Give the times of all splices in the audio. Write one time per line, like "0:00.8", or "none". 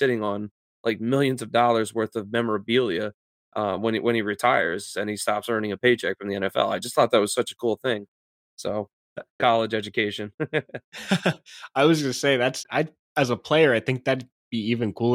0:09.4
0:12.6